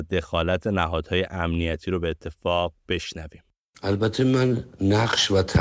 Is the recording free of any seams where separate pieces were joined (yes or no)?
yes